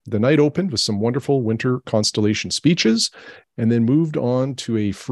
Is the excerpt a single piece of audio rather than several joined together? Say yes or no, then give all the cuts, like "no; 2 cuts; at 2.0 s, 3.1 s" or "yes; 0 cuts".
yes; 0 cuts